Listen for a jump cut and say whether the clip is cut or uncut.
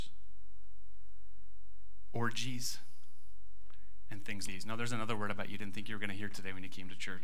cut